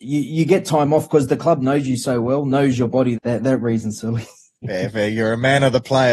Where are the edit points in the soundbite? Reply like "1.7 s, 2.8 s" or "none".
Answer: 3.1 s